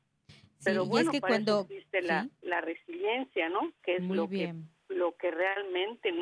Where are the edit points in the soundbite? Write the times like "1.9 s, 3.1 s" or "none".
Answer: 3.8 s